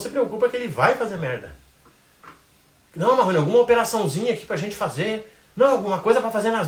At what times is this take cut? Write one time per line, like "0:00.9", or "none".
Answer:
0:05.5